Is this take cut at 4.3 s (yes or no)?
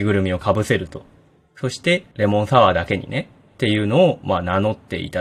no